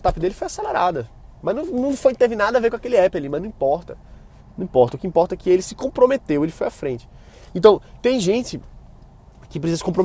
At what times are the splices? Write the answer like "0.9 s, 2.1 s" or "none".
1.4 s